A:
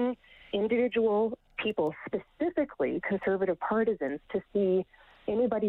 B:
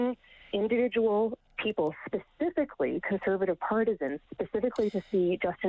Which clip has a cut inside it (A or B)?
B